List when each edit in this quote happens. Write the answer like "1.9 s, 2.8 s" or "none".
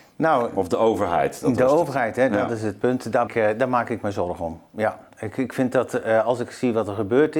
3.3 s

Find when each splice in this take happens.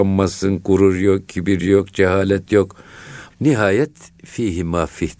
3.3 s

